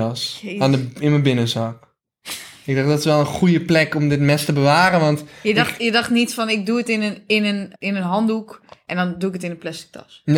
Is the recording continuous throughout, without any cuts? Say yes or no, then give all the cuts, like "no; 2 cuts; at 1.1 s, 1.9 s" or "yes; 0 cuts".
no; 1 cut; at 7.8 s